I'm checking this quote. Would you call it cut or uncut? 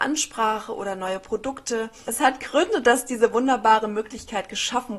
cut